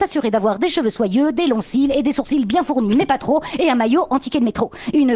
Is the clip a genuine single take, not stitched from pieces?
yes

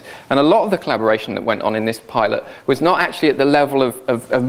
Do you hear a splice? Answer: no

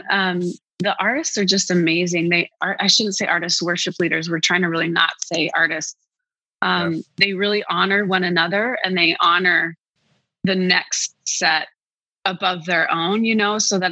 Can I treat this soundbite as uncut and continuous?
yes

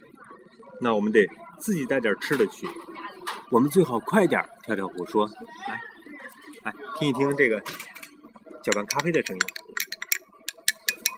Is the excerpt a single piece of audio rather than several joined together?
no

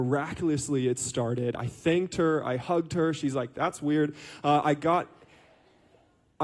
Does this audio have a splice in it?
no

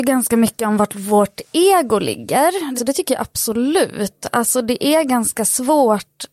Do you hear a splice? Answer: yes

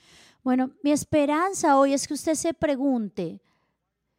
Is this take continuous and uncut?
yes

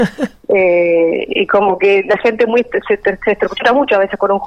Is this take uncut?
yes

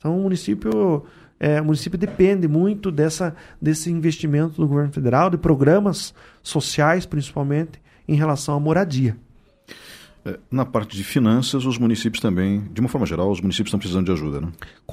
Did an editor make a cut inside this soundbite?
no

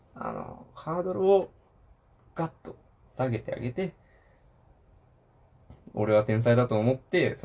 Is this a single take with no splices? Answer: yes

